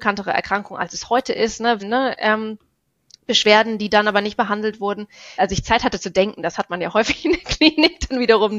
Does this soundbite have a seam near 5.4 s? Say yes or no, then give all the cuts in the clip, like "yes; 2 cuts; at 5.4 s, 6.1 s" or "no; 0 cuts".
yes; 2 cuts; at 1.8 s, 5.4 s